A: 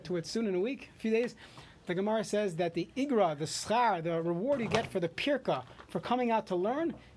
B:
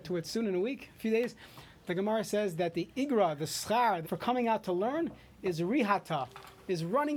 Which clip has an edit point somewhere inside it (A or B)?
B